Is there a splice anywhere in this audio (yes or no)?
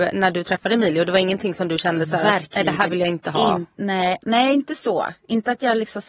no